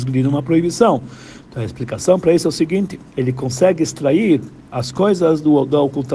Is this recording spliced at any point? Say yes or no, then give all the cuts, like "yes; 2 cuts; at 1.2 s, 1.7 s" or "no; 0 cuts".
yes; 2 cuts; at 1.4 s, 3.1 s